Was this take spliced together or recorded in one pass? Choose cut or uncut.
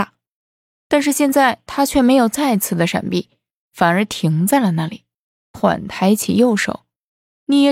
cut